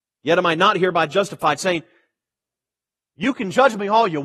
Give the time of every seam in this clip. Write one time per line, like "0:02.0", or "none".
none

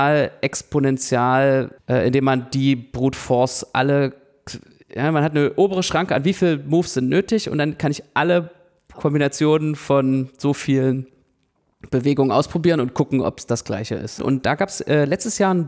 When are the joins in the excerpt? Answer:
0:01.8
0:14.2

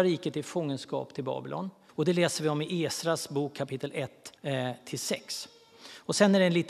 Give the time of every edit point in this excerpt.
0:01.9
0:04.4

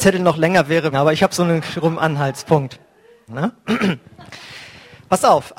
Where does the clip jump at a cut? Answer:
0:00.9
0:03.3

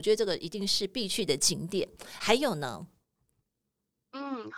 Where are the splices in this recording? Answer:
none

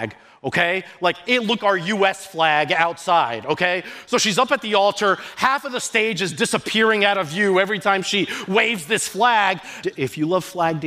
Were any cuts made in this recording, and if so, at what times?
0:01.6
0:09.8

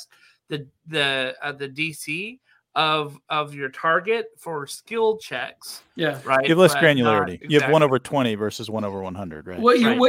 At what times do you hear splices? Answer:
0:07.4

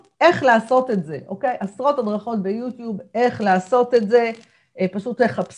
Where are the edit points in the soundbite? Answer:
none

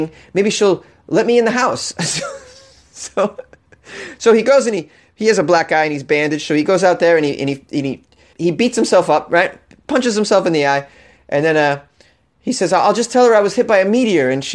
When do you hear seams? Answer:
0:08.3

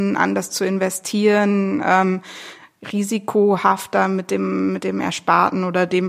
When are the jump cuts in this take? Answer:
none

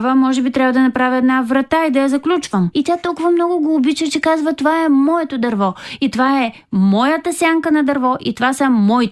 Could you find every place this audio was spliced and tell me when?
0:02.7

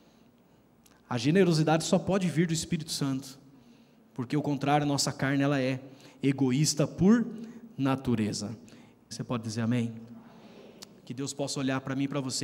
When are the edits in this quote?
0:09.1

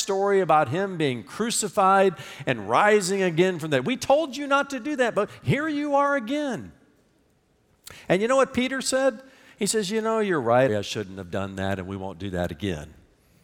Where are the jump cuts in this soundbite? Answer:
0:10.7

